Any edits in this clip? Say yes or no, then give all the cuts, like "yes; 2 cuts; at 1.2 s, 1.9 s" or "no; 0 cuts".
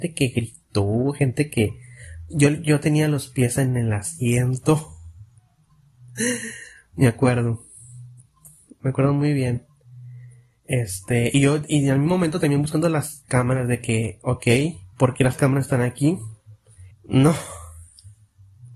yes; 2 cuts; at 14.9 s, 16.9 s